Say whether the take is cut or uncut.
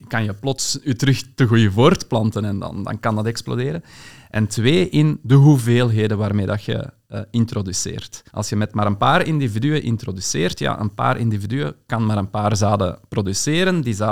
cut